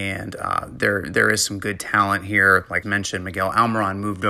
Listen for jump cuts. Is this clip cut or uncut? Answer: cut